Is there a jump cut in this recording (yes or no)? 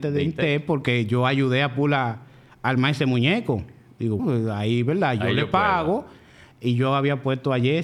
yes